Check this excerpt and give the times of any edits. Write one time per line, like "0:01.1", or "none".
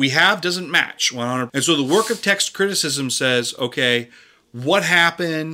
0:01.5